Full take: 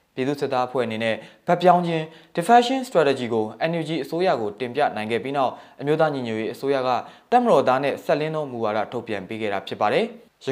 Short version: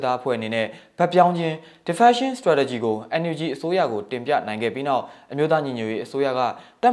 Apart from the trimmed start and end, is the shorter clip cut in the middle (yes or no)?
no